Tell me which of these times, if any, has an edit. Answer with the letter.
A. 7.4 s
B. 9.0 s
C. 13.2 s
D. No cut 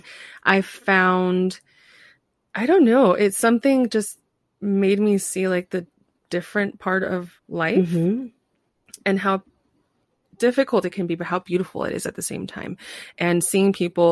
A